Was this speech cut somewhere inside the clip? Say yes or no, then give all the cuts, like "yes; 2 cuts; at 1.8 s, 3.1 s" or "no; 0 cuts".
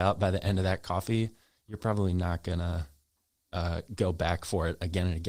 no; 0 cuts